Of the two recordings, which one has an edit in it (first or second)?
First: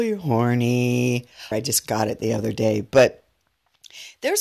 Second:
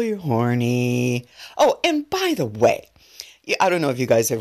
first